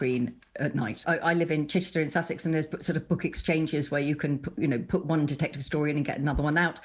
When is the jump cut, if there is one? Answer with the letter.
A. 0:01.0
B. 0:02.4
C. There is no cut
A